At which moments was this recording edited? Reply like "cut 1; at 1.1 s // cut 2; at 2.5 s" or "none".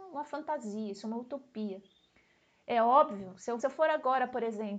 cut 1; at 3.6 s

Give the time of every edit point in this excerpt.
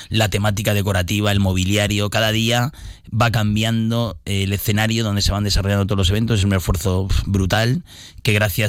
none

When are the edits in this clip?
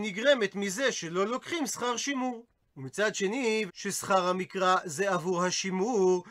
cut 1; at 3.7 s

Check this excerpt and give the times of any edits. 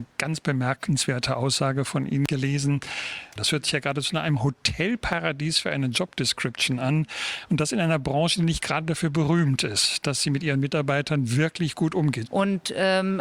cut 1; at 3.4 s // cut 2; at 12.3 s

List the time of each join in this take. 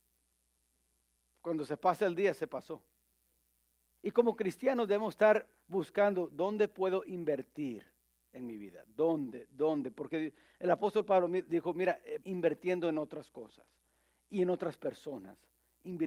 cut 1; at 4.0 s // cut 2; at 12.2 s

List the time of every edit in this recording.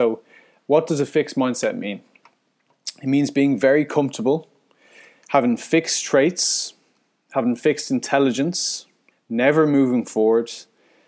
cut 1; at 9.1 s

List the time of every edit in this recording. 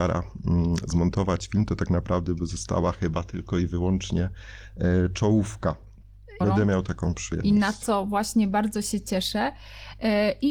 cut 1; at 6.4 s

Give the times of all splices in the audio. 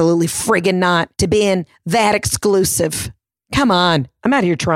cut 1; at 1.1 s

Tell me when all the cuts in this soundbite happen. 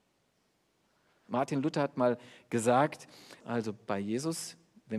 cut 1; at 1.3 s // cut 2; at 3.4 s

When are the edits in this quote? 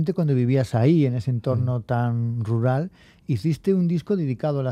none

